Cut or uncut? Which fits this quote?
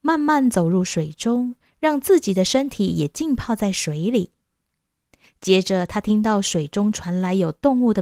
uncut